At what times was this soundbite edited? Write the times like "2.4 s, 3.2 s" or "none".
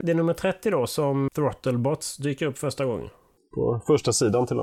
1.3 s